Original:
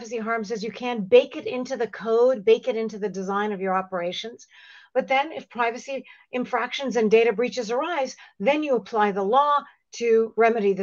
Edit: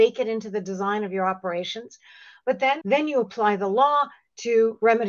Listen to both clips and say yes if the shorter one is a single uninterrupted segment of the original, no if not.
no